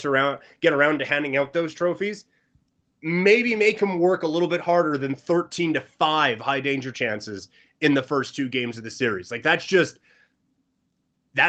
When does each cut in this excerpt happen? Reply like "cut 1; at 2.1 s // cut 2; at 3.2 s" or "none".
none